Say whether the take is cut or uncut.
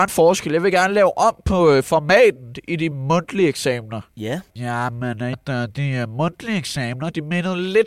cut